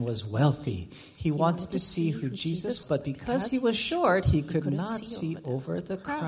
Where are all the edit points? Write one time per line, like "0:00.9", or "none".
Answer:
0:02.8

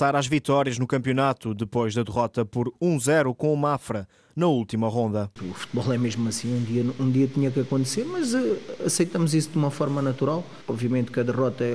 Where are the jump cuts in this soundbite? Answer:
none

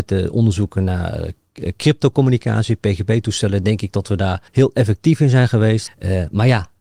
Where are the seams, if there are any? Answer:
0:04.5
0:05.9

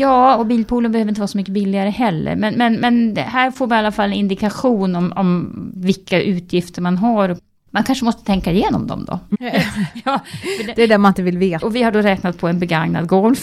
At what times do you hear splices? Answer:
0:09.3
0:11.6

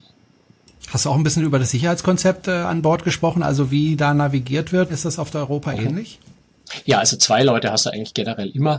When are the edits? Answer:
0:04.9

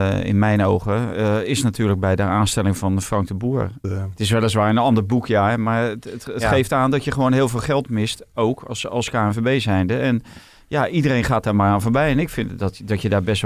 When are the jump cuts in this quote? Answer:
0:03.8

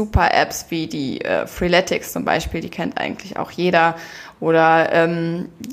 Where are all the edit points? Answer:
none

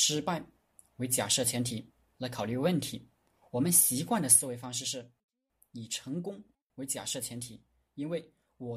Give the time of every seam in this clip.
none

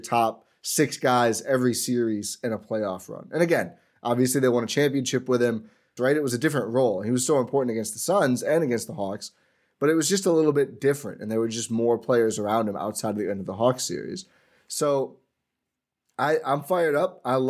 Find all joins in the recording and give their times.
0:06.0

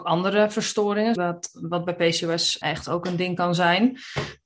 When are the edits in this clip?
0:01.2
0:02.6

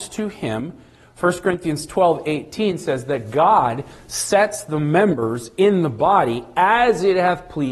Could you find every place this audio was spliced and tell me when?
none

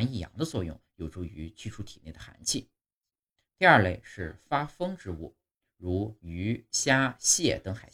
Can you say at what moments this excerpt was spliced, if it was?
none

